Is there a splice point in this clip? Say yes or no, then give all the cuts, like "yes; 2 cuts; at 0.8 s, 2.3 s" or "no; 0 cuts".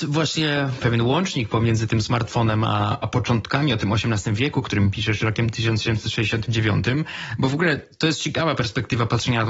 no; 0 cuts